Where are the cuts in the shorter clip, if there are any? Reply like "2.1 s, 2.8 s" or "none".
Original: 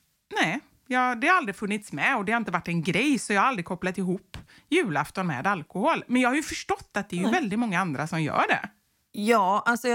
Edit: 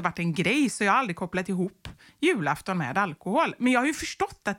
none